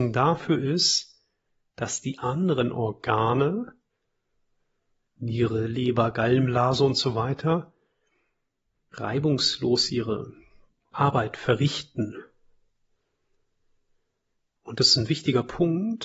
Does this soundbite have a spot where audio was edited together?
no; 0 cuts

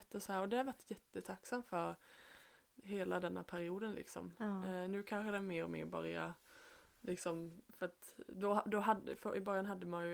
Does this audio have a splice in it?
no; 0 cuts

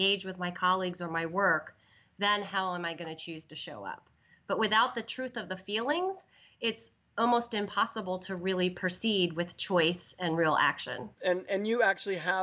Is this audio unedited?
no; 1 cut; at 11.1 s

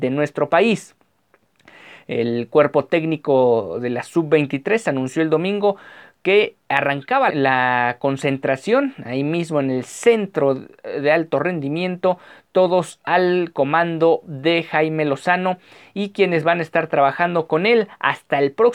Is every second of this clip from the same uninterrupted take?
no; 1 cut; at 7.3 s

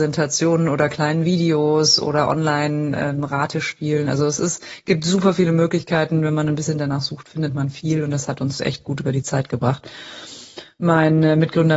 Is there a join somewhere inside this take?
no; 0 cuts

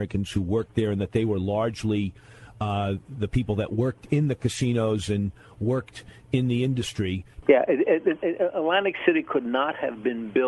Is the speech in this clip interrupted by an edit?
yes; 1 cut; at 7.4 s

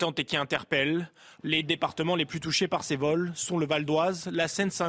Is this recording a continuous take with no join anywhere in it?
no; 1 cut; at 1.4 s

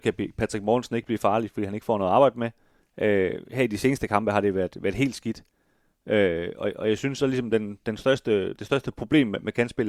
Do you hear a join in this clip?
yes; 1 cut; at 2.8 s

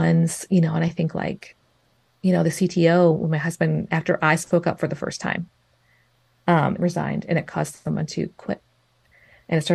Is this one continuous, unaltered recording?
no; 1 cut; at 6.8 s

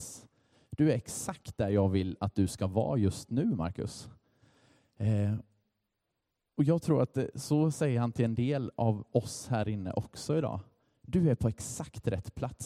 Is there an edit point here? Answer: no; 0 cuts

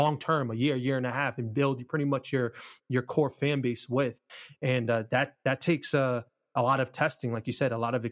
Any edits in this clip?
no; 0 cuts

